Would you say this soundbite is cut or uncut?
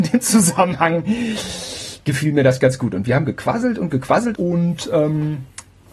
cut